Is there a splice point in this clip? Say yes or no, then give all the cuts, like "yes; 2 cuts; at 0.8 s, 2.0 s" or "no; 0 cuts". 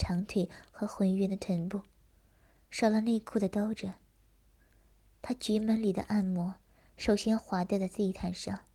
no; 0 cuts